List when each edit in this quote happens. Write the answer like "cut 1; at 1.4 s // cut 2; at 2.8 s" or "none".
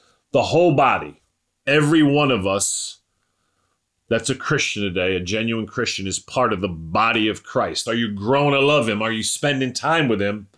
cut 1; at 7.9 s

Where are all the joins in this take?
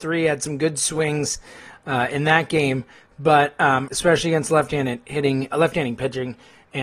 cut 1; at 3.9 s // cut 2; at 5.5 s

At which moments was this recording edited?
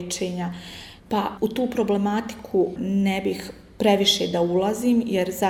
cut 1; at 1.0 s

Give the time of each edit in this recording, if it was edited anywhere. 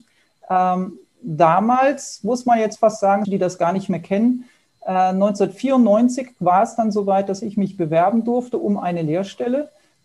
cut 1; at 3.2 s

